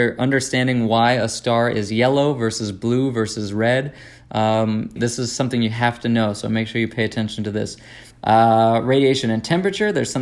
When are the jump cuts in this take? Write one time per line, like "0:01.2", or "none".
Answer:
0:05.0
0:08.1